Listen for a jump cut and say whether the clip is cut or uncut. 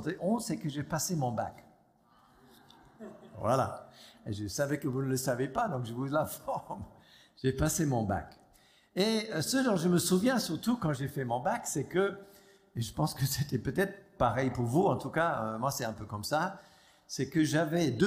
uncut